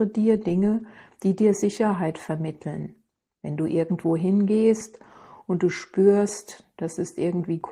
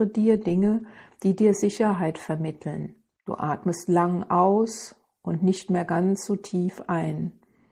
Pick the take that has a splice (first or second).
second